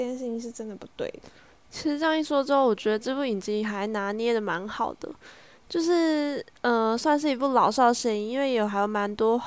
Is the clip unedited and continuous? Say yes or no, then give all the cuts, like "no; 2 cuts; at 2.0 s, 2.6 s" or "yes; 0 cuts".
yes; 0 cuts